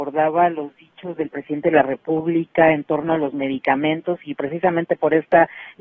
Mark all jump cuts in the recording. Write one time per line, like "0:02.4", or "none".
0:04.3